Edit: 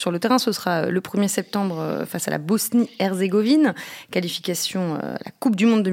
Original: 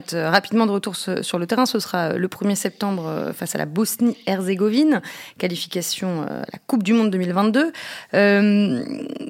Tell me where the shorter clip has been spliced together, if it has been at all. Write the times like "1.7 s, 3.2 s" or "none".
none